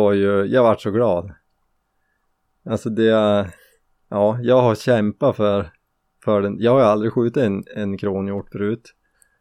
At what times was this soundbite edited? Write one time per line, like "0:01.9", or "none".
none